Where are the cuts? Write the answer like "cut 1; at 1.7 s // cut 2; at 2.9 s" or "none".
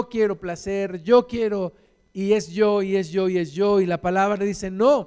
none